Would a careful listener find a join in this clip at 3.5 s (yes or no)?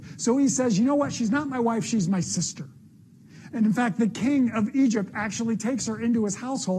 yes